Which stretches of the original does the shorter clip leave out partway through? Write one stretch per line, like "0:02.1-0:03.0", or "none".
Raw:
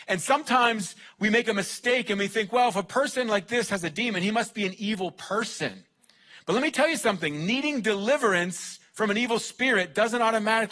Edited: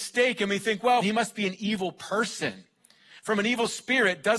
0:02.7-0:04.2
0:06.4-0:08.9